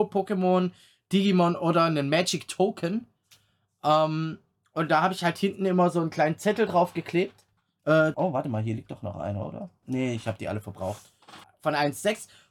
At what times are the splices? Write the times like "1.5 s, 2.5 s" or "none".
8.1 s, 9.8 s, 11.4 s